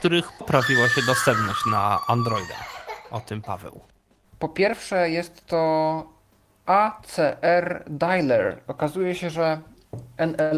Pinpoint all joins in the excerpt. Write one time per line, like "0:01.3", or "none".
0:04.2